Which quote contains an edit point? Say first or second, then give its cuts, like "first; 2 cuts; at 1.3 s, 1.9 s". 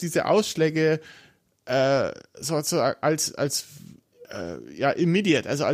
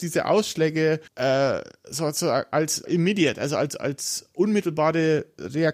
second; 2 cuts; at 1.1 s, 2.9 s